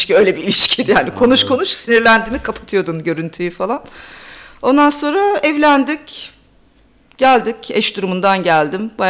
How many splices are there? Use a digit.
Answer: 0